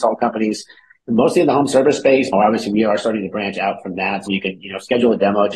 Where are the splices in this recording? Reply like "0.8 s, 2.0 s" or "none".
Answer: 2.3 s, 4.3 s